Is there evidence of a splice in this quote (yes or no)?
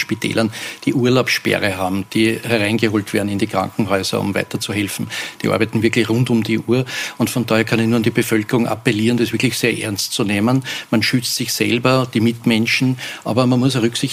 no